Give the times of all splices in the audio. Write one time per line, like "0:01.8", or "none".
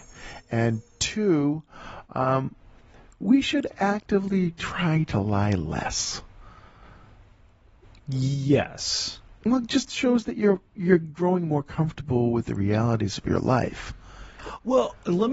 none